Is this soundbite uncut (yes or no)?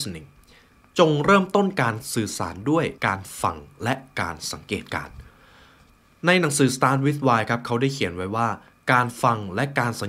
no